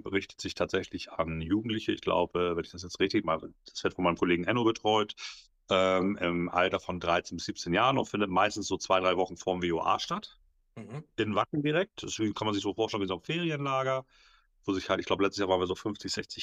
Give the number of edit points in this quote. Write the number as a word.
zero